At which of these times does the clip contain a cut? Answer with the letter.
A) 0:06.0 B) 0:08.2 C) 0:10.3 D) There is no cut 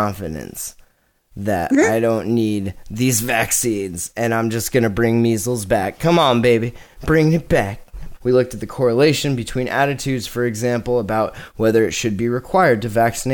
B